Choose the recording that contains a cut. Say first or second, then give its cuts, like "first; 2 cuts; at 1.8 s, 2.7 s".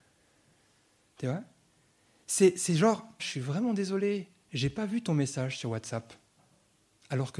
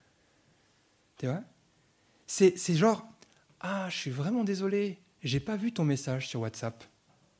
first; 1 cut; at 3.2 s